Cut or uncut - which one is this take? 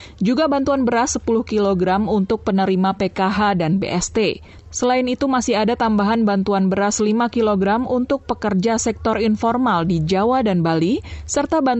uncut